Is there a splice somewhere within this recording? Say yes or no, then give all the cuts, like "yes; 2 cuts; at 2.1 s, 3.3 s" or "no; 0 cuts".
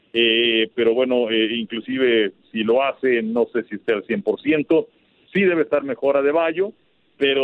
no; 0 cuts